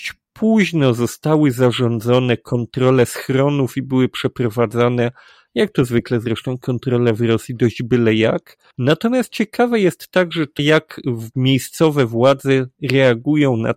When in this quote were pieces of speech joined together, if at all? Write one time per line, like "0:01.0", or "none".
0:08.7
0:10.6